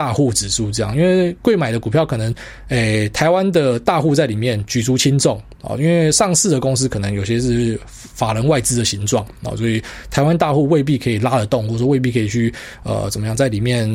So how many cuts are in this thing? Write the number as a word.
zero